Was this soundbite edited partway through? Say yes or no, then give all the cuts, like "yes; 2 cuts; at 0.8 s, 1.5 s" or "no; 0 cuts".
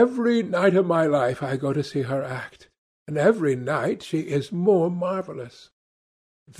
no; 0 cuts